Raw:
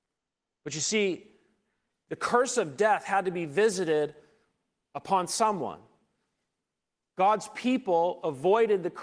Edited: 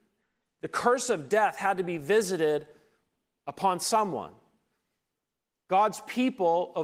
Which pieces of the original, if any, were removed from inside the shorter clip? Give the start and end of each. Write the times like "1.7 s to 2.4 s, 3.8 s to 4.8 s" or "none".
none